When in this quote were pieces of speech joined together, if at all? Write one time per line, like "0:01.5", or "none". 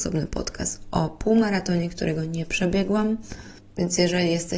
none